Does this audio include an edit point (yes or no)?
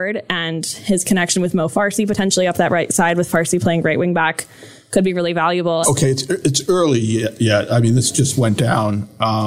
yes